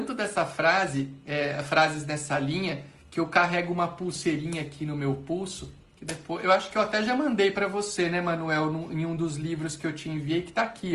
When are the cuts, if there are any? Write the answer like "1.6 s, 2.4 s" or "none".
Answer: none